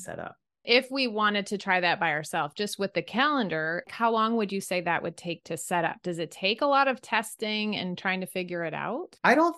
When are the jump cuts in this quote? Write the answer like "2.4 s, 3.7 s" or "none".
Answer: 3.8 s